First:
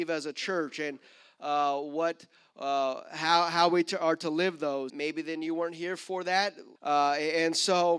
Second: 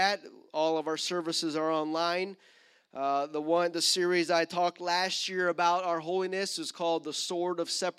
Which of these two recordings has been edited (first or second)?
first